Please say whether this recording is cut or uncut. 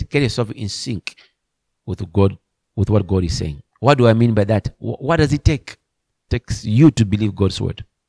cut